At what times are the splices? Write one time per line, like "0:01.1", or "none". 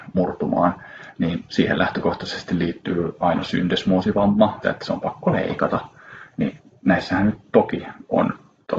0:04.6